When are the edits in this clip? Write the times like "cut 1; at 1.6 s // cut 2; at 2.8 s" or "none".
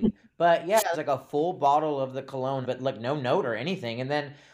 cut 1; at 0.9 s // cut 2; at 2.6 s